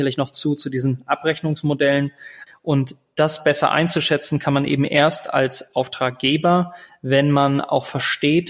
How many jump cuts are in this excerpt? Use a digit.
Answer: 1